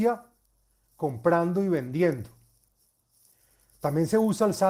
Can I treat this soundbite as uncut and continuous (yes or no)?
yes